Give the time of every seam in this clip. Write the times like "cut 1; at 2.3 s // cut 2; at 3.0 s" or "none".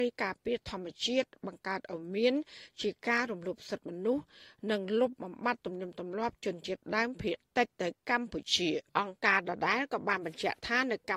cut 1; at 8.9 s